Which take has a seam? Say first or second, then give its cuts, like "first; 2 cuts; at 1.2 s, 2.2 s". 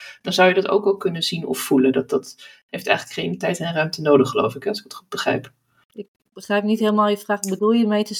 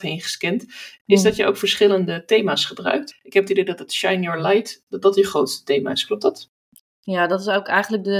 second; 1 cut; at 3.1 s